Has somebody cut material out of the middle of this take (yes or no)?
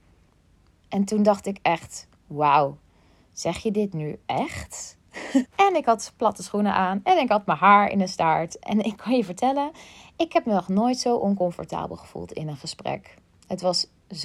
yes